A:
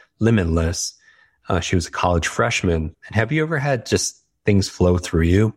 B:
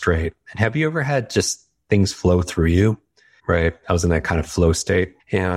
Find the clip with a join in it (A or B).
A